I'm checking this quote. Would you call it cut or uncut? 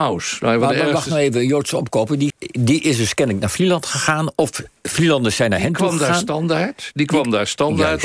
cut